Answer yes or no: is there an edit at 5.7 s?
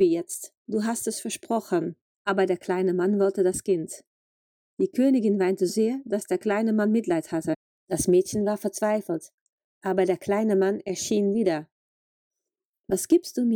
yes